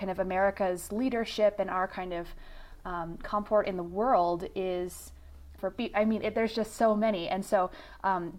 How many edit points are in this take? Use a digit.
1